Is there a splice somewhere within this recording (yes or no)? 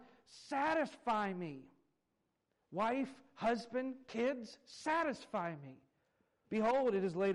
yes